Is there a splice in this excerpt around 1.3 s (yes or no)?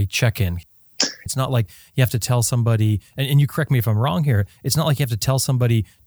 yes